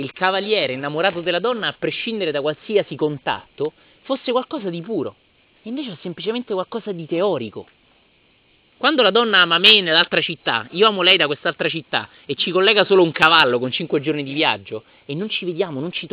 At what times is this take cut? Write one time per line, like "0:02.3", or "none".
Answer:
0:08.7